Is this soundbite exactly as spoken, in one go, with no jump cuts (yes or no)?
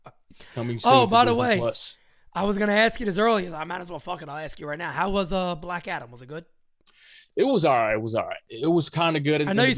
yes